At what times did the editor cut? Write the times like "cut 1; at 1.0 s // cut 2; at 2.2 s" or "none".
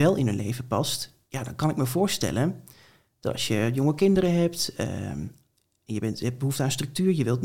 none